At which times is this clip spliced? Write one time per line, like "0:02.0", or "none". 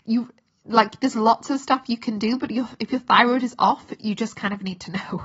none